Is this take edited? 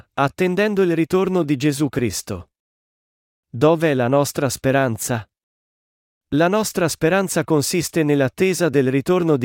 no; 0 cuts

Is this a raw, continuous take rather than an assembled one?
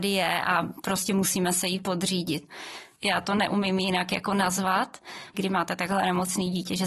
no; 2 cuts; at 3.0 s, 5.3 s

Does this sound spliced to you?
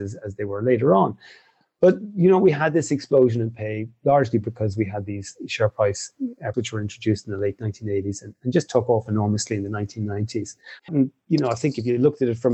yes; 2 cuts; at 6.5 s, 10.9 s

